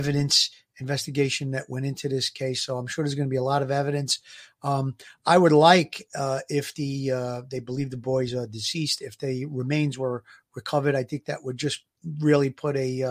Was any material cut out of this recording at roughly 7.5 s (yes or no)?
no